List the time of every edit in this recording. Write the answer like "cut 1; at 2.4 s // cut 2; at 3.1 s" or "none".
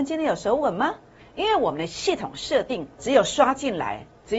cut 1; at 1.2 s // cut 2; at 3.0 s